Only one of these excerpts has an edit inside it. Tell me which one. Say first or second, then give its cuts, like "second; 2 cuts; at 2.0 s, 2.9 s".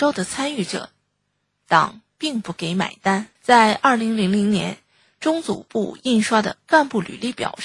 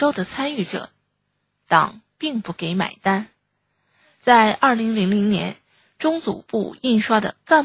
first; 1 cut; at 3.4 s